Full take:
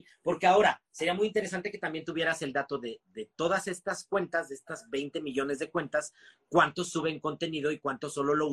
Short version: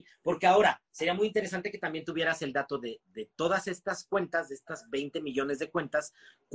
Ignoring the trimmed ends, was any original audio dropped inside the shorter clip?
no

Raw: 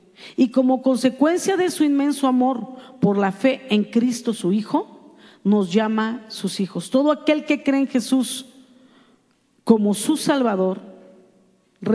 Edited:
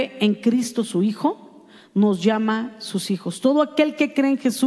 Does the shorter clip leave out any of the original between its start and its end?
no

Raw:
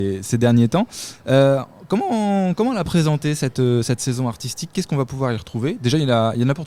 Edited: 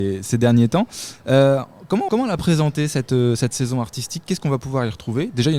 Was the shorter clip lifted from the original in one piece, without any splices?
no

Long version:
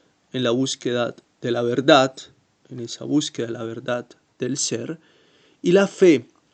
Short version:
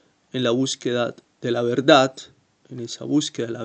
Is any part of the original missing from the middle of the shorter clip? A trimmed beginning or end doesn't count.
no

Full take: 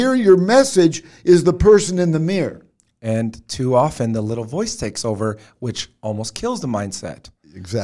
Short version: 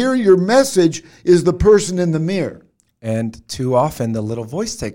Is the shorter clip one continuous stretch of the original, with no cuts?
yes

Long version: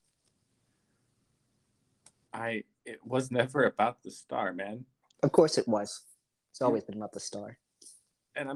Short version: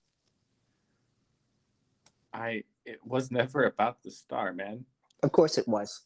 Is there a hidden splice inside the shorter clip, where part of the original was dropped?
no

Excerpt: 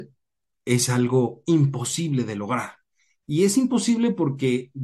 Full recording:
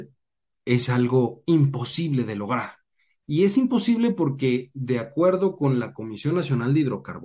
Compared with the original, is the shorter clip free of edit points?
yes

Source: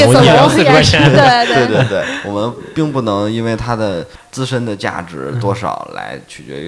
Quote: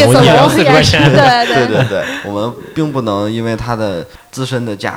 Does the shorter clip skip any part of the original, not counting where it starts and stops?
no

